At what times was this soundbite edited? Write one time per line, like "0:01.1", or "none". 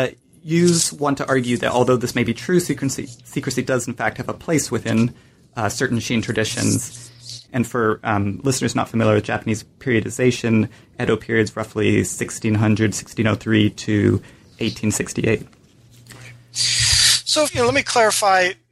0:07.4
0:17.5